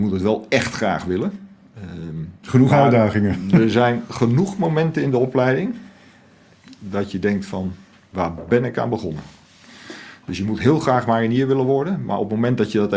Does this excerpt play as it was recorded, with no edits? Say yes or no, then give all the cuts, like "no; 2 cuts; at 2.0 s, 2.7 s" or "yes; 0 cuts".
no; 1 cut; at 2.4 s